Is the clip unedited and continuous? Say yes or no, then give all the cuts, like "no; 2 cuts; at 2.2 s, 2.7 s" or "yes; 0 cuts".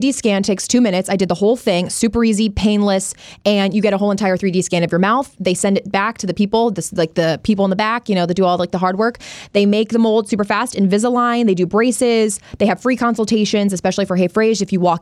yes; 0 cuts